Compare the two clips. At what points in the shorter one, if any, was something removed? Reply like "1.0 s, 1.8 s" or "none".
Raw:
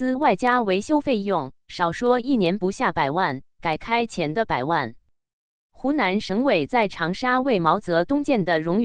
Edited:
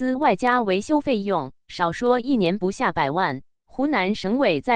3.5 s